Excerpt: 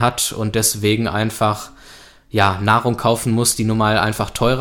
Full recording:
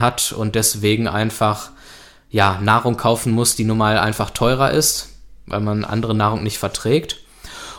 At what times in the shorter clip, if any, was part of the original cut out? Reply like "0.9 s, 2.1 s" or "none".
none